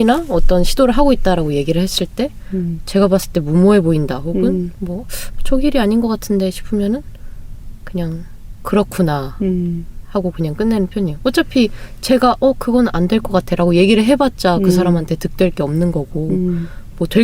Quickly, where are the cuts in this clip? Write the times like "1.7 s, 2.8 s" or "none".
none